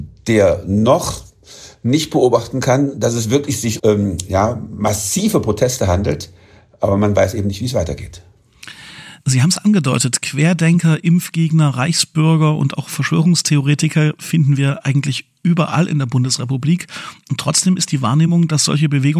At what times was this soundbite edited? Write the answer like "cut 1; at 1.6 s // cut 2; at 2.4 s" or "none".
cut 1; at 3.8 s